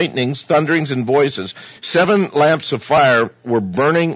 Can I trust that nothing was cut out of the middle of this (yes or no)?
yes